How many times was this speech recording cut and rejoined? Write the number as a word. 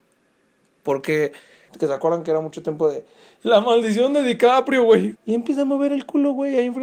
two